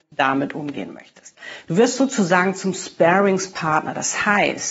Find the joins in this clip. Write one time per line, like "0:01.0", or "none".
0:01.7